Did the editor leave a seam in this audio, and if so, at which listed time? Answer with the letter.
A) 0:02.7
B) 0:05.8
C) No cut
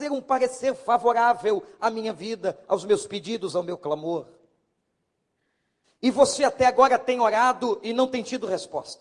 B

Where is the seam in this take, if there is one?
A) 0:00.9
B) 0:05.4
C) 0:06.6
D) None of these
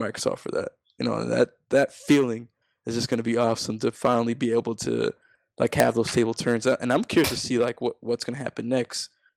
D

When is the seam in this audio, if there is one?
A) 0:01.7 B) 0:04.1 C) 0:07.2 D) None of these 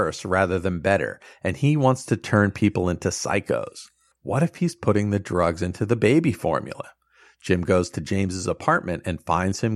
B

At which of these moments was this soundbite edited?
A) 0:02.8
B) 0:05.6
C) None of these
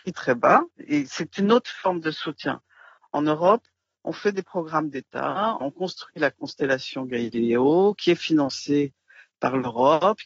B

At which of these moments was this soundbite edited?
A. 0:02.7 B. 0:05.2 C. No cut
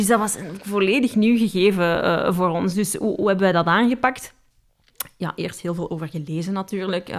C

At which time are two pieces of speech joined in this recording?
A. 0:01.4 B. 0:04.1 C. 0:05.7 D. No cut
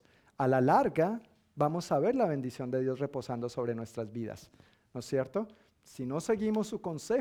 C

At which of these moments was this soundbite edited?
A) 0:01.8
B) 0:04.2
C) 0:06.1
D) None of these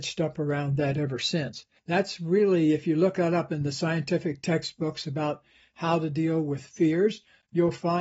A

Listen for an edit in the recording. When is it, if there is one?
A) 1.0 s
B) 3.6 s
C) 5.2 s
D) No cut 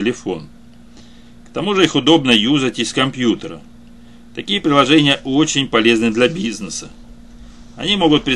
D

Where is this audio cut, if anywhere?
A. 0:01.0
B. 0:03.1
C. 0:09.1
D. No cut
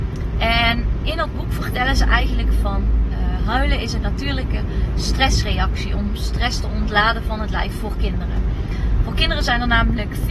A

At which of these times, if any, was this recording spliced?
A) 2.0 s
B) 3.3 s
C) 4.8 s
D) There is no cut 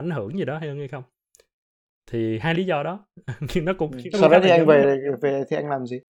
D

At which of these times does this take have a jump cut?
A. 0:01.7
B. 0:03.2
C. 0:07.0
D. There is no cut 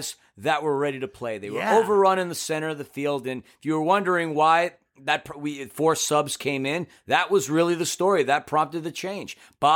D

